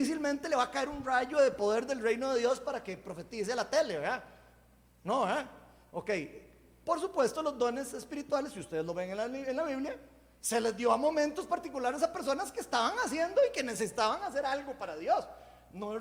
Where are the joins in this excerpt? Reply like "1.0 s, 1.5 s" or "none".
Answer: none

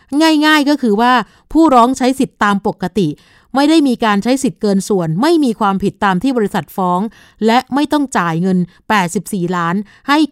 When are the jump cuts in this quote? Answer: none

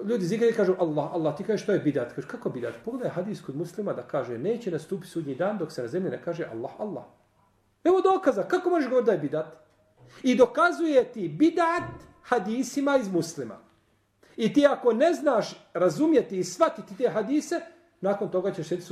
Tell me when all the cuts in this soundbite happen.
none

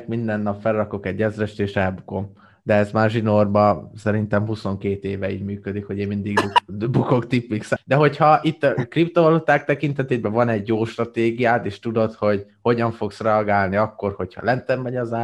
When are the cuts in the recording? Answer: 7.8 s

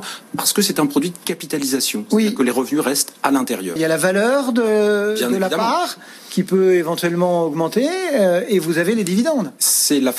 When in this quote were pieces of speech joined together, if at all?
3.8 s

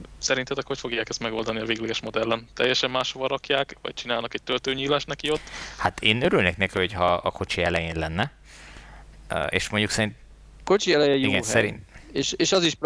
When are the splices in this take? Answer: none

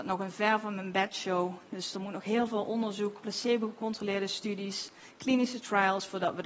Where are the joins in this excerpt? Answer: none

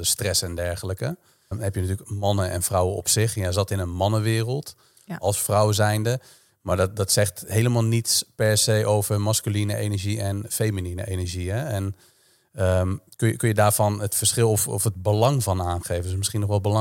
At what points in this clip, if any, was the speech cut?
1.5 s

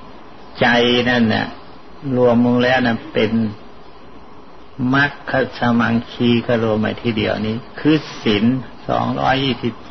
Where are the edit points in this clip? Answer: 6.8 s

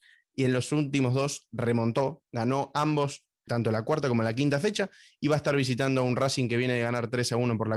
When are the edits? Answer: 3.5 s

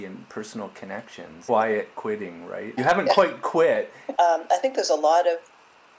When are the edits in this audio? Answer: 1.5 s, 2.8 s, 4.1 s

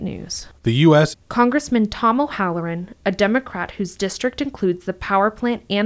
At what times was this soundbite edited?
1.1 s

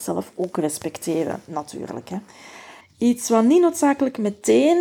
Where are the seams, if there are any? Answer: 2.8 s

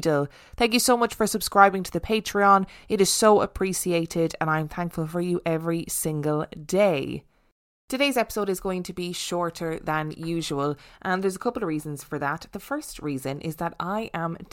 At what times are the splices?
none

